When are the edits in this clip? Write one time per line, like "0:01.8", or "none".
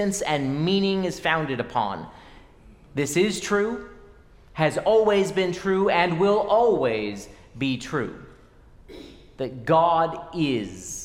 none